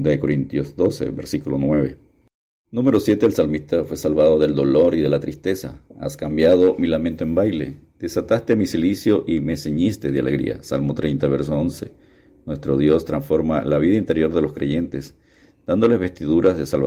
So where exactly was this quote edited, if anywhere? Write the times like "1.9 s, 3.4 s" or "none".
none